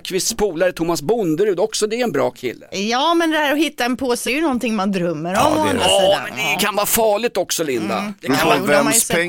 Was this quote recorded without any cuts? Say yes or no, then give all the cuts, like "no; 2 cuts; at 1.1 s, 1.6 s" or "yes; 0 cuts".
no; 1 cut; at 4.3 s